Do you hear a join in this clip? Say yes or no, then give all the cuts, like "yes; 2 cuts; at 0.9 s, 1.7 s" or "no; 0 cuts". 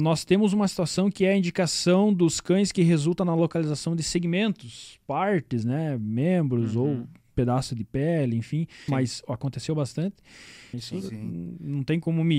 yes; 2 cuts; at 8.9 s, 10.7 s